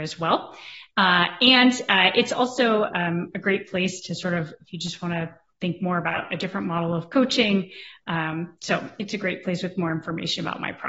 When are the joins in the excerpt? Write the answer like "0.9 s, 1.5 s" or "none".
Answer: none